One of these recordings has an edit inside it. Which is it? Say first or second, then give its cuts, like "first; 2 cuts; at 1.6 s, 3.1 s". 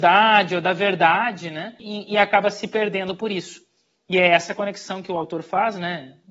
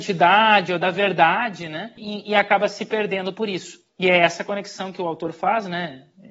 second; 1 cut; at 3.9 s